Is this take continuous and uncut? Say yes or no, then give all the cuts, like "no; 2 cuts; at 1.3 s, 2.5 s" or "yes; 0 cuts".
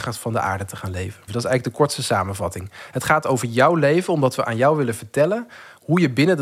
no; 1 cut; at 1.3 s